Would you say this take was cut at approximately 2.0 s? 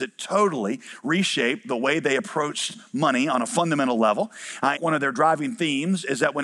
no; 1 cut; at 4.8 s

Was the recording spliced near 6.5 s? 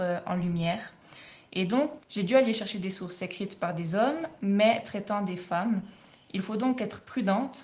no; 1 cut; at 2.0 s

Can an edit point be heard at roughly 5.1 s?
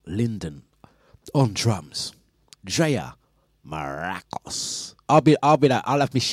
yes; 2 cuts; at 2.5 s, 5.1 s

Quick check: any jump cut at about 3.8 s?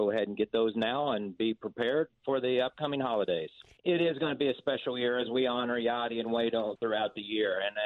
yes; 1 cut; at 3.8 s

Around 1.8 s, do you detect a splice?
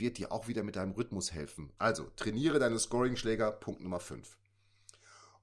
yes; 1 cut; at 1.8 s

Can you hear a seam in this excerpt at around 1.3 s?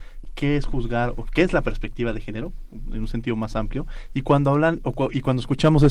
yes; 1 cut; at 1.3 s

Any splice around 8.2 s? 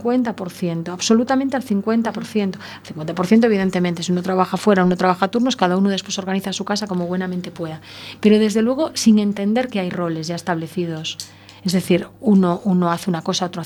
no; 0 cuts

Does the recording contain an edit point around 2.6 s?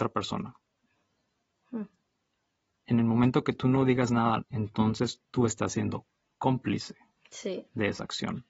no; 1 cut; at 4.4 s

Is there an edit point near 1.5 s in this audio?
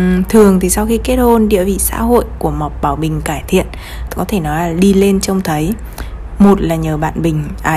no; 1 cut; at 4.1 s

